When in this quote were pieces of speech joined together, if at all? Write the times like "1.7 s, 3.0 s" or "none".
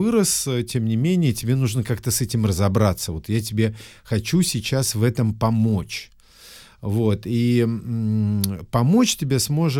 none